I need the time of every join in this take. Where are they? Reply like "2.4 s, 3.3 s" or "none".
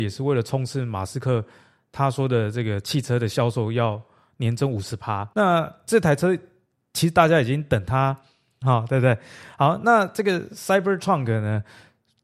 8.6 s